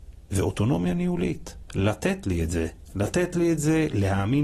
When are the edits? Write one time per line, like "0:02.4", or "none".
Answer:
none